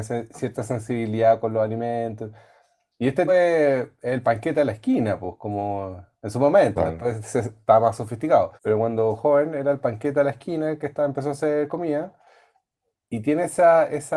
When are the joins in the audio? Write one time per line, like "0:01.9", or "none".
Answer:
0:03.3
0:08.6